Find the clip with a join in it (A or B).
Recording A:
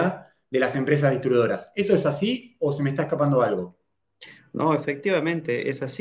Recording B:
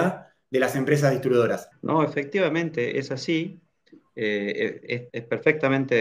B